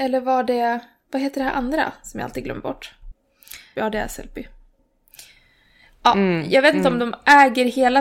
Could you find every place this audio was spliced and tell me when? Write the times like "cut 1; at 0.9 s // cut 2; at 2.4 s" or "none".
cut 1; at 3.8 s